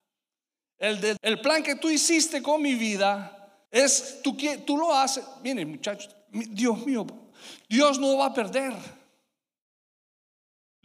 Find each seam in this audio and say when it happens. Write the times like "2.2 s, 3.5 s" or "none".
1.2 s, 3.7 s

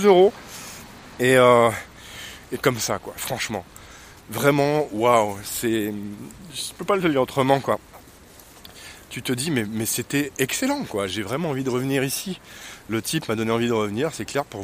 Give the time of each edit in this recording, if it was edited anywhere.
1.2 s, 2.5 s

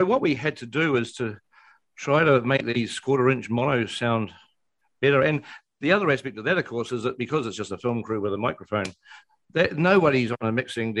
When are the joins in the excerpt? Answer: none

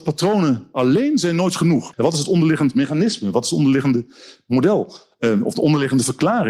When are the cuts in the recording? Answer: 1.9 s

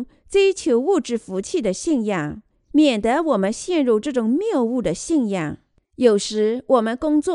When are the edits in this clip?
2.7 s, 5.8 s

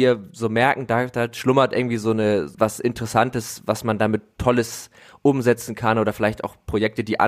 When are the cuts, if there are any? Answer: 2.5 s, 3.6 s

